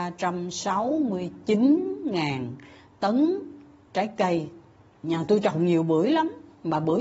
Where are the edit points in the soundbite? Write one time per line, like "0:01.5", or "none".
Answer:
none